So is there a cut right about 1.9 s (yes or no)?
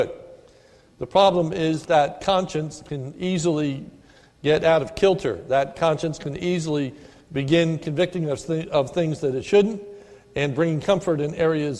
yes